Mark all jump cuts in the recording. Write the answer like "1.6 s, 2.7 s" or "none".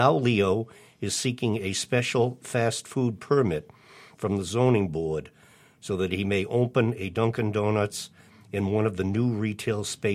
none